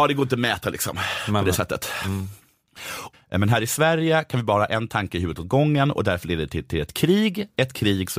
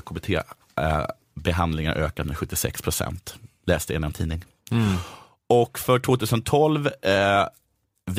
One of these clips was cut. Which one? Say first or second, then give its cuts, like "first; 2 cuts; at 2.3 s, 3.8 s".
first; 2 cuts; at 3.1 s, 6.7 s